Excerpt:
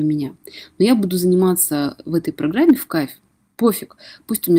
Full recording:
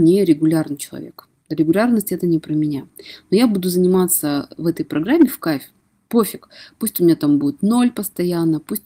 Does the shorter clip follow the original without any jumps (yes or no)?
yes